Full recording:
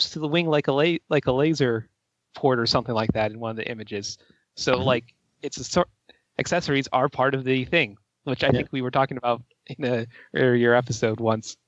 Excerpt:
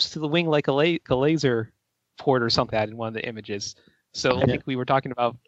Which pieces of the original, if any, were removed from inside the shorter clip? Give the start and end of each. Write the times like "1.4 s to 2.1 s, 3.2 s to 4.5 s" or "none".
1.1 s to 1.2 s, 2.9 s to 3.1 s, 4.8 s to 8.5 s